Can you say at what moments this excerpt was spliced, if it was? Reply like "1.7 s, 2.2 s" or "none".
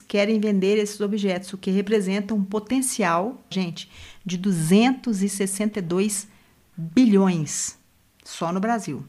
3.5 s